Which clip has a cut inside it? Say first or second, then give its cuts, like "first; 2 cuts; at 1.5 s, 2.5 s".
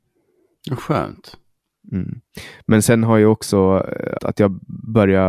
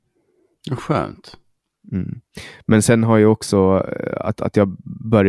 first; 1 cut; at 4.2 s